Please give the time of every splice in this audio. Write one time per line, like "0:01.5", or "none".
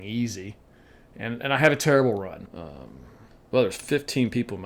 0:02.5